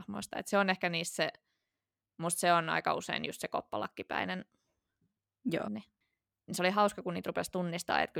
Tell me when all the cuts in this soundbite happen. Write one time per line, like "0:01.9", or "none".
0:05.6